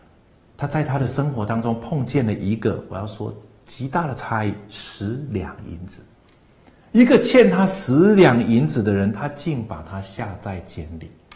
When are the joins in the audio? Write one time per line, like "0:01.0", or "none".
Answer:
none